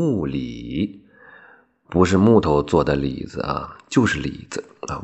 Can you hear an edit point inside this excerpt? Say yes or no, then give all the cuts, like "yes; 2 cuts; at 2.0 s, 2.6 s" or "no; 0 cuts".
no; 0 cuts